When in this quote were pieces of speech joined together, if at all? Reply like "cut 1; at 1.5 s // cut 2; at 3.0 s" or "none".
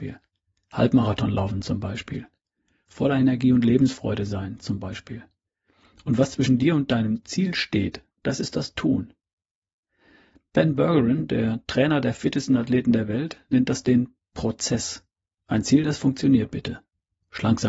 cut 1; at 8.1 s // cut 2; at 15.3 s